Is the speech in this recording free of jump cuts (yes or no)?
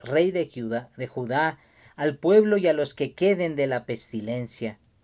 no